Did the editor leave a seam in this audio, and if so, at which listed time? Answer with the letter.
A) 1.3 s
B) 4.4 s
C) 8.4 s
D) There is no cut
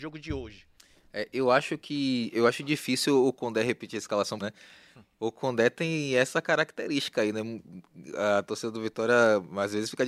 B